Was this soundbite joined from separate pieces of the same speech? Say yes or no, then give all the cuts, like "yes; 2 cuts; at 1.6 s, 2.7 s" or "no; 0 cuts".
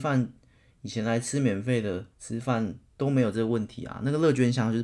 yes; 1 cut; at 2.1 s